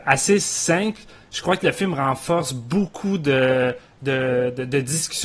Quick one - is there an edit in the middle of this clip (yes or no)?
no